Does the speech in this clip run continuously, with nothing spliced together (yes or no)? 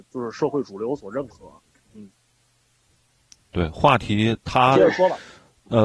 yes